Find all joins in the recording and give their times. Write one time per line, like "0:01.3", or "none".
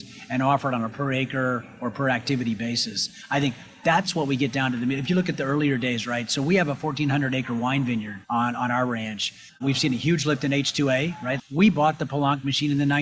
0:08.2
0:09.5
0:11.4